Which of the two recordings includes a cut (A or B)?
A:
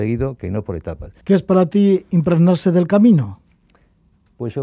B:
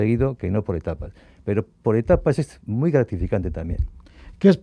A